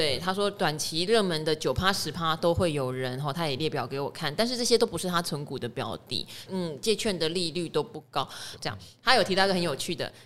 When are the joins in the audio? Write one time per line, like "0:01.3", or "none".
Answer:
0:06.5
0:08.6